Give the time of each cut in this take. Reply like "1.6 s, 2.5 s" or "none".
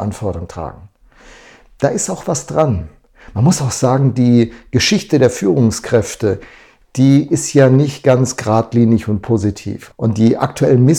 9.9 s